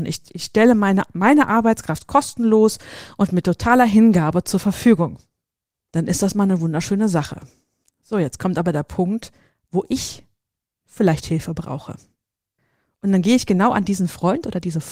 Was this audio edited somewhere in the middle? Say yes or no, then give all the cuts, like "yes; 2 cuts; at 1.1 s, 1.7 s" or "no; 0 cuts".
no; 0 cuts